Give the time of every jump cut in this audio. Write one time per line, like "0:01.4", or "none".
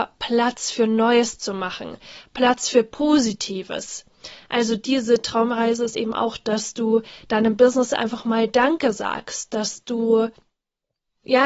none